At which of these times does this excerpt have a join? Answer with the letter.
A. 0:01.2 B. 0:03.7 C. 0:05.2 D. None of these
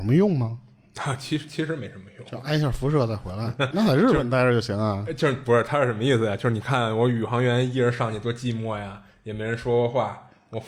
B